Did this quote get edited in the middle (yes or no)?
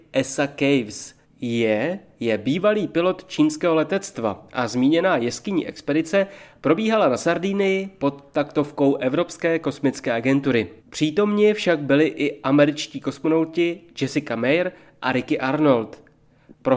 yes